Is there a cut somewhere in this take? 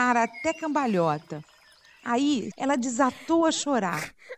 yes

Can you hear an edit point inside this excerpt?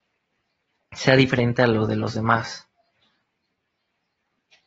no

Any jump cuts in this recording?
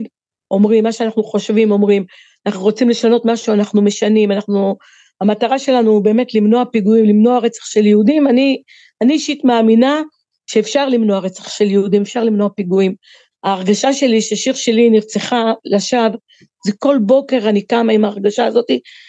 no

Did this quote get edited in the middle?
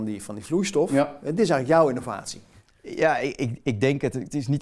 no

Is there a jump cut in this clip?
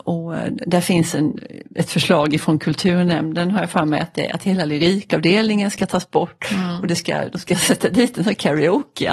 no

